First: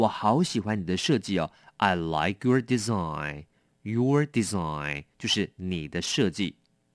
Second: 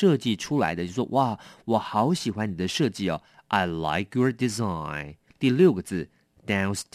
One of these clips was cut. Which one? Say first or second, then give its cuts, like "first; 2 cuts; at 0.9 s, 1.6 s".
second; 1 cut; at 5.3 s